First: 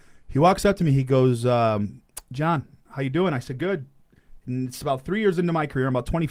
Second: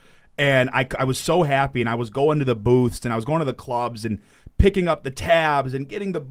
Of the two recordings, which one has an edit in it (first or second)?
first